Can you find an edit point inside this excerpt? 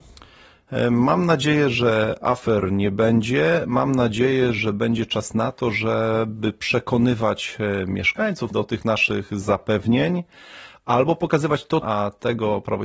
yes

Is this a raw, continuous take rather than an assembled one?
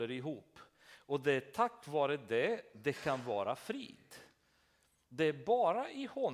yes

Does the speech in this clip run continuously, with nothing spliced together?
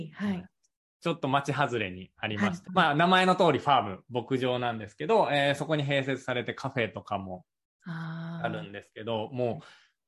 no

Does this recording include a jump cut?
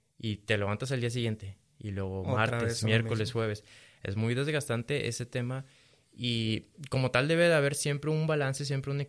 no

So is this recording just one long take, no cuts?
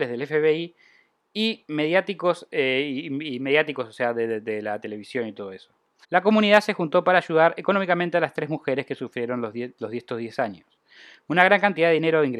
no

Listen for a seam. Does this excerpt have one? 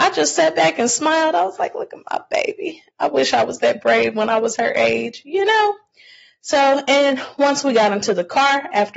no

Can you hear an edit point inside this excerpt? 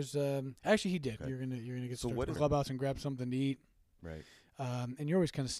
yes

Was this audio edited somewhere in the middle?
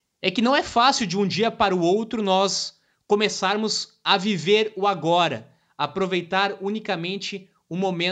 no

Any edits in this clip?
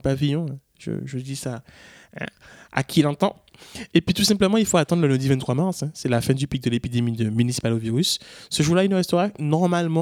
no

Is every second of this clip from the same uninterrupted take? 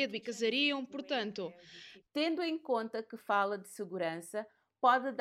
no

